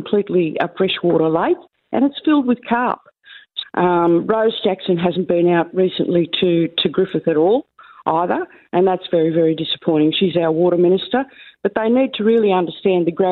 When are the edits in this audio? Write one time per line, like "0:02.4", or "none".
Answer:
0:03.6